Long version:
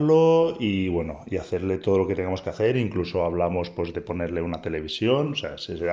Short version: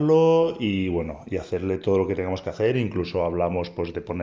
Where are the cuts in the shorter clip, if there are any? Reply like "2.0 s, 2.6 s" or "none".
none